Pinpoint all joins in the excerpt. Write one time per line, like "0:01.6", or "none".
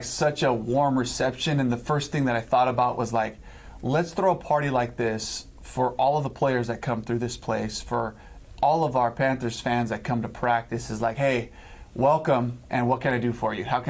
none